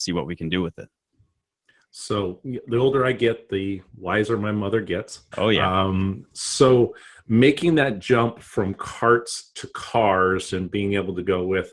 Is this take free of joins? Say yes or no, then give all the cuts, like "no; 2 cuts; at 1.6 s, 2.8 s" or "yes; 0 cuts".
no; 1 cut; at 5.3 s